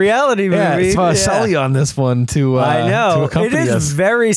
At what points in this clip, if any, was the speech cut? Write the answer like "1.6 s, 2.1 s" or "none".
0.9 s